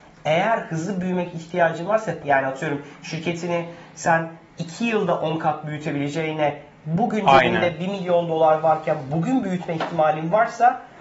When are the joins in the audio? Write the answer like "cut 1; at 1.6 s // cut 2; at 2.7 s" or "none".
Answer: cut 1; at 2.2 s